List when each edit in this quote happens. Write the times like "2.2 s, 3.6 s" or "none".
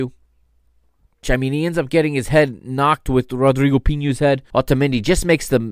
1.2 s, 4.5 s